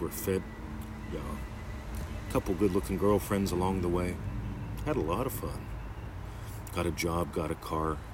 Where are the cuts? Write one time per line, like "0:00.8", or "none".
none